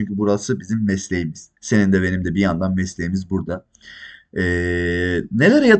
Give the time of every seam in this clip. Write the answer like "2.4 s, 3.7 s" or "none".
1.6 s

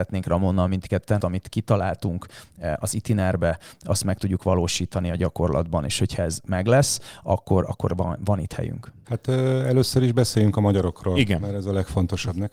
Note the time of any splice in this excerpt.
1.2 s, 3.8 s, 9.0 s

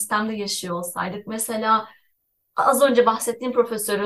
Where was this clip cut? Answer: none

